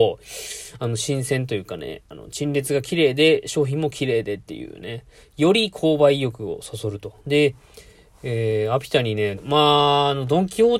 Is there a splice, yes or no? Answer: yes